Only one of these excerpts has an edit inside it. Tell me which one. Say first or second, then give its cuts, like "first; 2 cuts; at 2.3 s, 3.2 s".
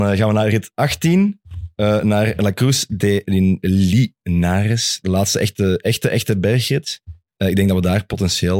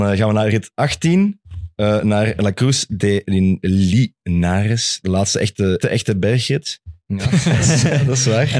second; 2 cuts; at 5.8 s, 7.1 s